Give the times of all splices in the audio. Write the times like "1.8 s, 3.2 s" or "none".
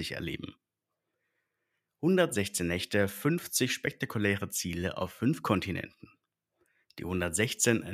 6.8 s